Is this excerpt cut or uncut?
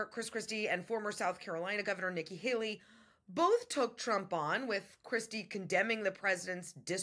uncut